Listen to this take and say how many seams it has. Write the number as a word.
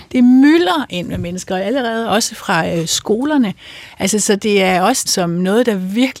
one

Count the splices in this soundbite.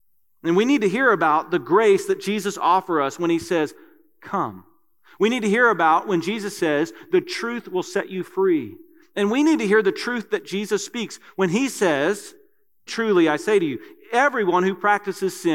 one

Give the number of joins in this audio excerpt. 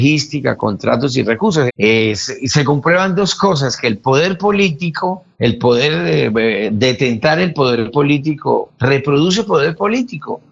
two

